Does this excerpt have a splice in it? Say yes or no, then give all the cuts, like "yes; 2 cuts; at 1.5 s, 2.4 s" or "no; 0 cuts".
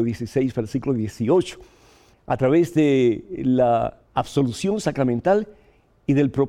yes; 2 cuts; at 2.1 s, 4.0 s